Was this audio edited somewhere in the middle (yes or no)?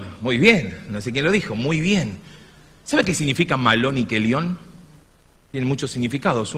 no